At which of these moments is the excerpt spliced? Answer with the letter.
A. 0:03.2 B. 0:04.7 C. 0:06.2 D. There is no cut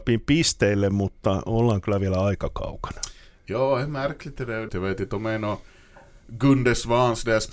B